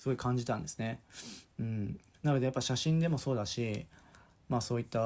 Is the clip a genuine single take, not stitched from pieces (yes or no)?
yes